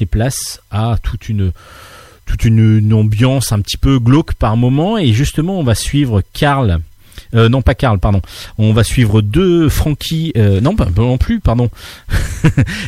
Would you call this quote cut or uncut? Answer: uncut